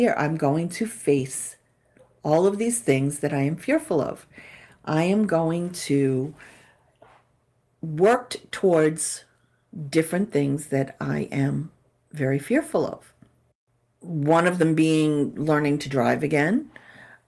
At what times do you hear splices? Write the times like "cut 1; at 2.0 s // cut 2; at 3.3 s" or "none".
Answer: cut 1; at 7.6 s